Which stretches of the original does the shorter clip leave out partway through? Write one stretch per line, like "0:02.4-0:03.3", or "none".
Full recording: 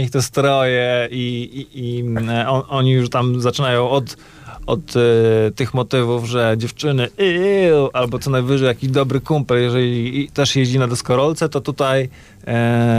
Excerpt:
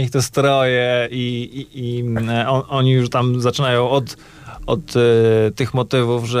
none